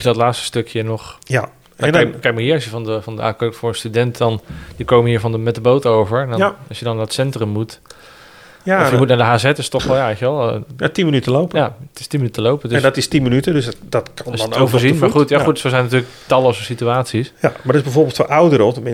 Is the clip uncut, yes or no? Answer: yes